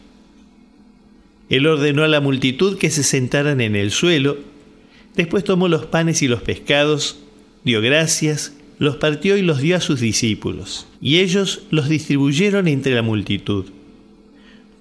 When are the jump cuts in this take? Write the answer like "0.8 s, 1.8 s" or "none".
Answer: 10.9 s